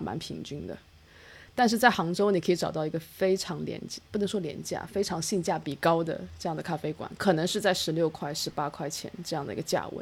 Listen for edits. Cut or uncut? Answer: uncut